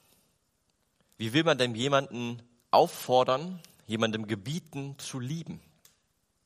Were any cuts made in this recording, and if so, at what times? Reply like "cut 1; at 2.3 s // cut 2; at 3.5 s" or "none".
cut 1; at 1.1 s